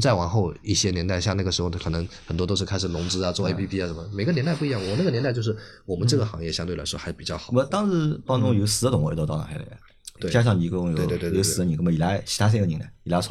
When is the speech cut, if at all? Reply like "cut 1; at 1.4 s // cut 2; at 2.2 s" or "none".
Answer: none